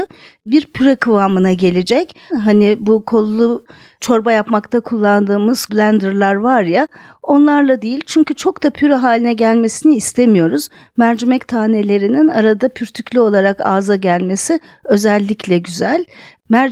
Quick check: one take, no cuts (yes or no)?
no